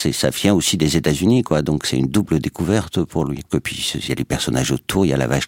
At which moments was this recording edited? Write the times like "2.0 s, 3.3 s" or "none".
3.5 s